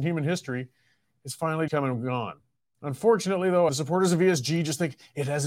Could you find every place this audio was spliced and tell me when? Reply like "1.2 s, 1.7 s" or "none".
1.7 s, 3.7 s

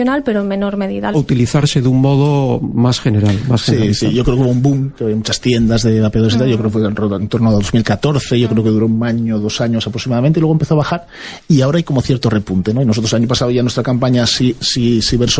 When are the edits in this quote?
1.1 s

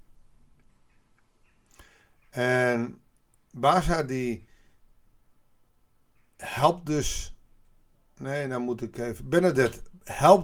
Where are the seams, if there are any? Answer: none

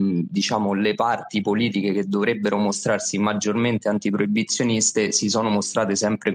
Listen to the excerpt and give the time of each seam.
none

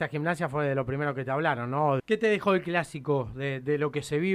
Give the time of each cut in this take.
2.0 s

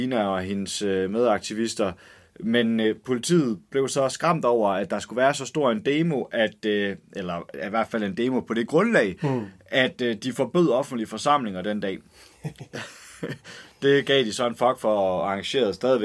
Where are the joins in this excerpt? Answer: none

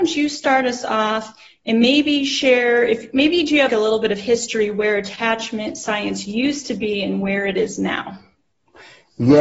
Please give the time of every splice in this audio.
3.7 s

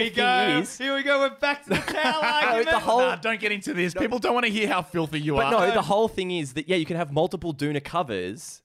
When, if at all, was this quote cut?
none

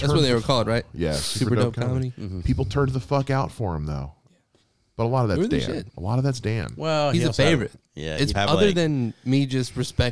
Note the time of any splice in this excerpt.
8.3 s

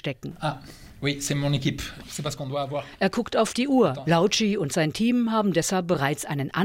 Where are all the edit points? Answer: 4.0 s

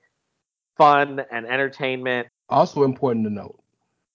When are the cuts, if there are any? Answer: 2.3 s

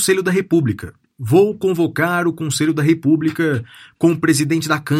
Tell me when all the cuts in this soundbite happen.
none

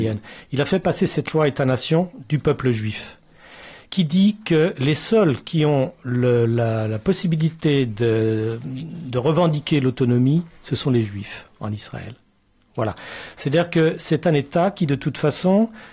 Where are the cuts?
none

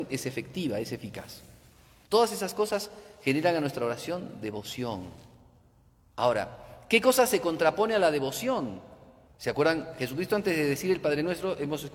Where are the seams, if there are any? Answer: 2.0 s, 9.3 s

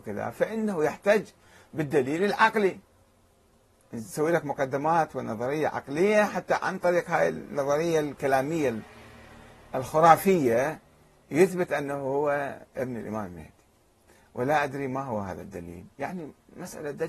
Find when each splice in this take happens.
none

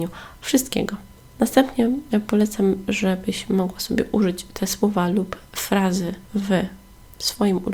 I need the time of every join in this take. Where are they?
1.4 s, 6.3 s

